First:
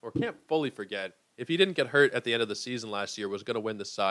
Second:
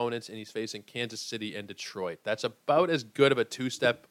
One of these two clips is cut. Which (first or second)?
first